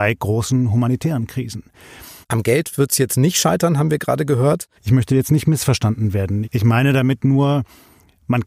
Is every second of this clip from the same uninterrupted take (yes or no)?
no